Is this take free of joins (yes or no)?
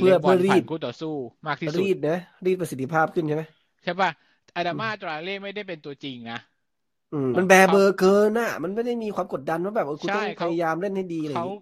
no